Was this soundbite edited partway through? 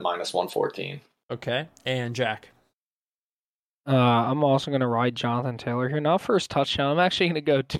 no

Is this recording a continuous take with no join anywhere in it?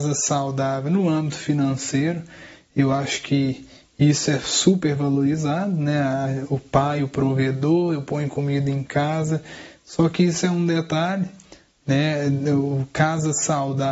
yes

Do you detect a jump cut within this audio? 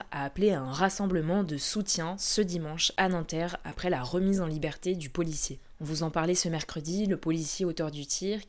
no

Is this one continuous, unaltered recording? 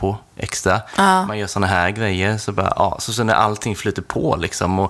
yes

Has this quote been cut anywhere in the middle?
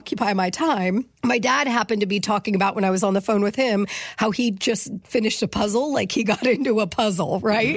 yes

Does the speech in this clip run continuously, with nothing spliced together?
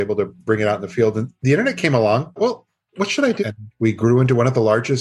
no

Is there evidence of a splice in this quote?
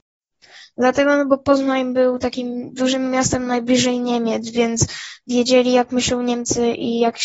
no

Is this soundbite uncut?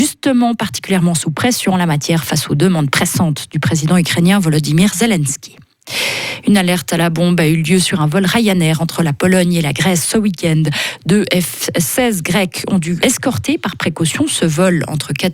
no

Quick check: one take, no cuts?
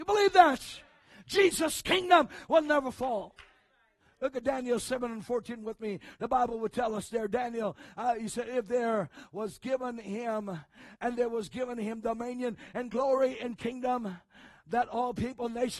yes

